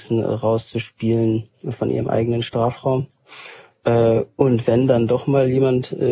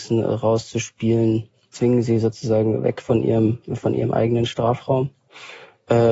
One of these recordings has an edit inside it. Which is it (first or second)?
first